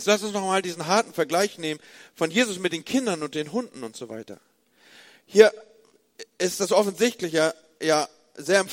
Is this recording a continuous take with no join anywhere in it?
yes; 0 cuts

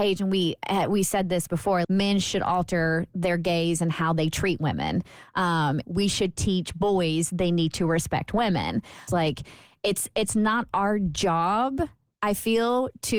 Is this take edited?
yes; 3 cuts; at 1.8 s, 5.8 s, 9.1 s

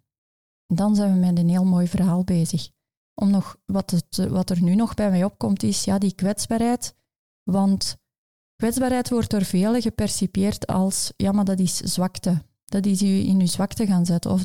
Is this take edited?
yes; 1 cut; at 7.3 s

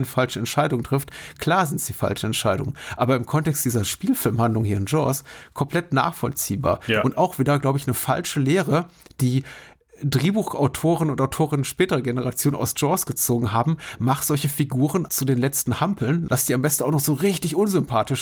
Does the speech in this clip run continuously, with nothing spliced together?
no; 2 cuts; at 15.1 s, 16.3 s

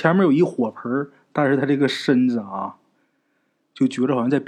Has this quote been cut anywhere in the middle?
no; 0 cuts

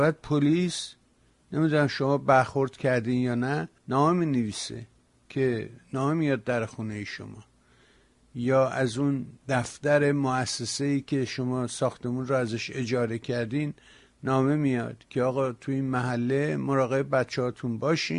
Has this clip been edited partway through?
yes; 2 cuts; at 3.8 s, 9.4 s

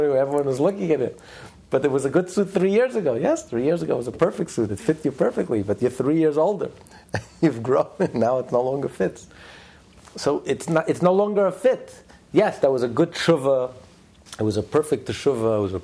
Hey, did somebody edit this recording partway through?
no; 0 cuts

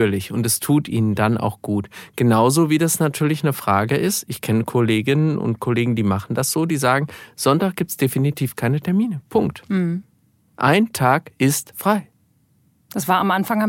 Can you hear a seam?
no; 0 cuts

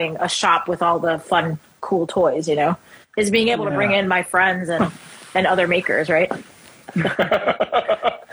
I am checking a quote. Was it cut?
no; 0 cuts

